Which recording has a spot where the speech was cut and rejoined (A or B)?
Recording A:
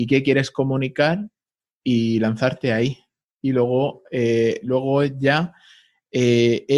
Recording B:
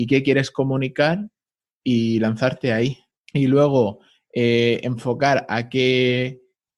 B